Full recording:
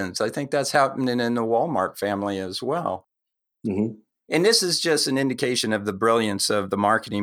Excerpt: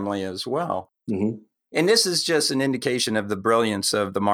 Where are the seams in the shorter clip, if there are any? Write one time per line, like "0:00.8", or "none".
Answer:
0:01.0

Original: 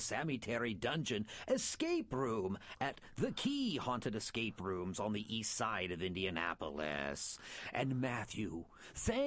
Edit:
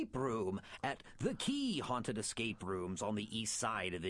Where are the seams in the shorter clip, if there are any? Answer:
none

